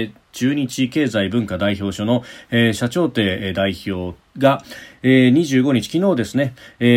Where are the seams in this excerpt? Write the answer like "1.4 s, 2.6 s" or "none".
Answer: none